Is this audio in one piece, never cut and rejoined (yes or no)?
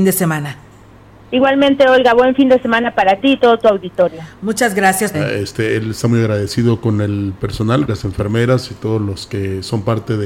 no